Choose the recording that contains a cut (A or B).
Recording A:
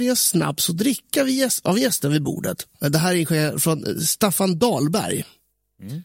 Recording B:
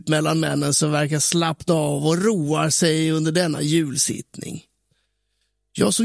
A